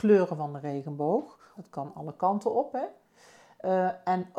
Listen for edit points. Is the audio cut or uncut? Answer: cut